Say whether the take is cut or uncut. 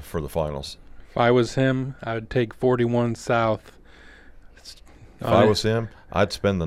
uncut